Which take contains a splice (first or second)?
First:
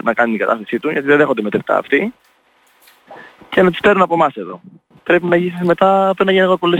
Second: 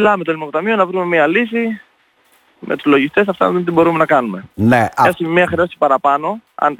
first